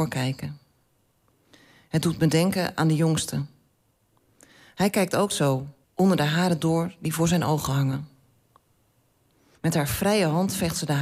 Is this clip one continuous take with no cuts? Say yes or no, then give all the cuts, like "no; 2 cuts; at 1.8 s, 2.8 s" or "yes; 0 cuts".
no; 2 cuts; at 5.8 s, 9.5 s